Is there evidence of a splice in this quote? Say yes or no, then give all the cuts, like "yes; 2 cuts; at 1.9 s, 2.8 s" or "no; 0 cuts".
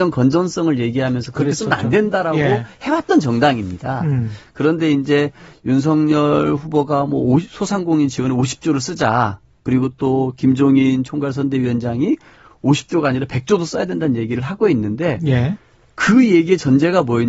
no; 0 cuts